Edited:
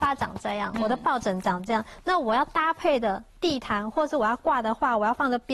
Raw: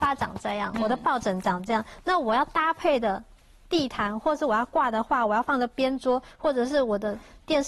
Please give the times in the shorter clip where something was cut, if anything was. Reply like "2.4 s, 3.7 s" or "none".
3.3 s